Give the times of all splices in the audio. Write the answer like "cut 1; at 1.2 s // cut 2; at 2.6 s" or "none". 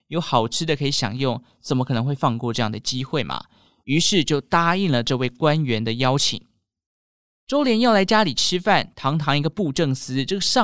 none